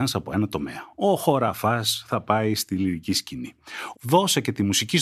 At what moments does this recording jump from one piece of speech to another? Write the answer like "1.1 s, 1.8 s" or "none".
3.9 s

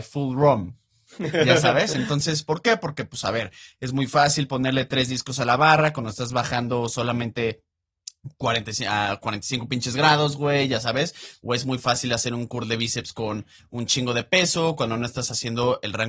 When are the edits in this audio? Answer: none

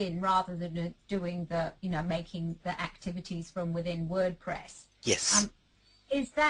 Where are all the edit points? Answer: none

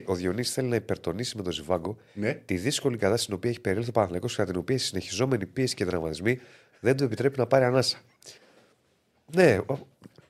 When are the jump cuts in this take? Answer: 8.4 s

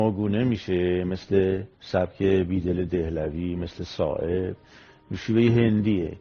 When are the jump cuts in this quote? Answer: 1.7 s

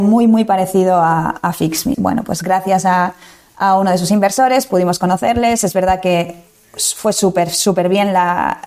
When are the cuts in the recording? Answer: 1.9 s

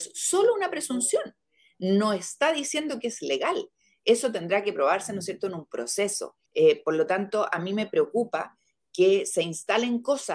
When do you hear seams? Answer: 6.5 s

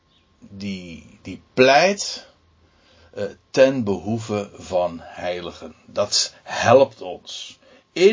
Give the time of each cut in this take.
none

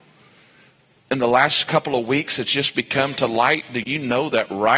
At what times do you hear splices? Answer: none

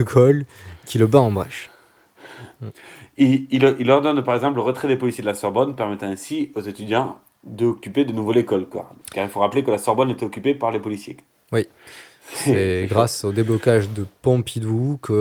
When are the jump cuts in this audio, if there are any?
2.5 s

